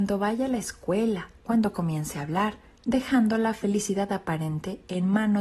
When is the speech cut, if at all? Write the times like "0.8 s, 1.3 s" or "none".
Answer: 1.4 s, 2.8 s